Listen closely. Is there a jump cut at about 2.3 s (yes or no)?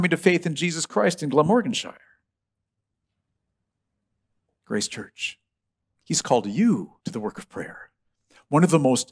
no